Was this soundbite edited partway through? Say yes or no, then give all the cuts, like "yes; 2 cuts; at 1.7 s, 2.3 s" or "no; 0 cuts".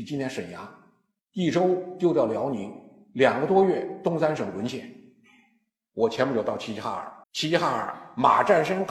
yes; 1 cut; at 7.2 s